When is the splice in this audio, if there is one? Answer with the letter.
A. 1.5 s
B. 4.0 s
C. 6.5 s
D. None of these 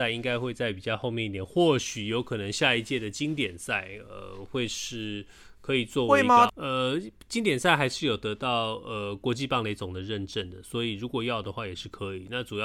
C